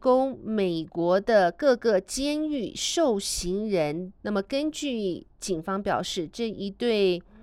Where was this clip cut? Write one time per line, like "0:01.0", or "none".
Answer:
0:04.2
0:05.3

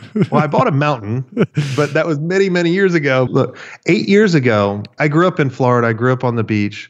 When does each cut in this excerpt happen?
0:03.3
0:05.0

